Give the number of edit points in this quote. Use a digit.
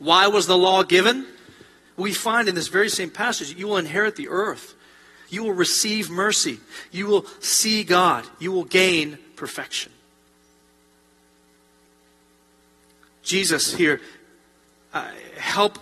1